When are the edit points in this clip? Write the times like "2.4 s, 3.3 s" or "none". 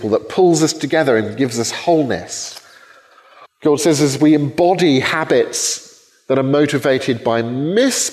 3.4 s